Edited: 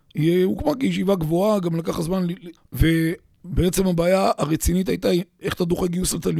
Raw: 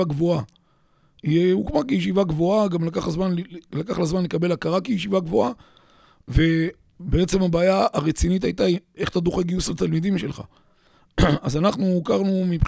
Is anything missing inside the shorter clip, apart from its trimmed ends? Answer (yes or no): yes